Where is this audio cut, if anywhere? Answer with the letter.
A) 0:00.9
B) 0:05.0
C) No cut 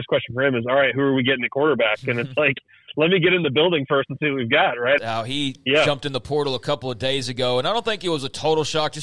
B